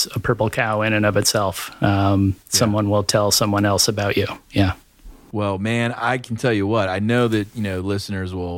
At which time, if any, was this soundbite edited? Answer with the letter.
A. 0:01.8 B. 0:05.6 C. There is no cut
C